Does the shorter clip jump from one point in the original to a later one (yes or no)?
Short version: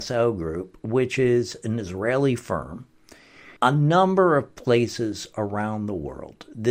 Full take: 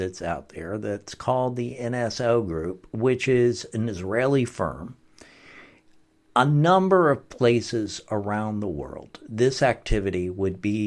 yes